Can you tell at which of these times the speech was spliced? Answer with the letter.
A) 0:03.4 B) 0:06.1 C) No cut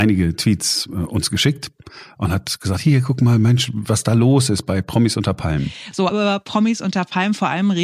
B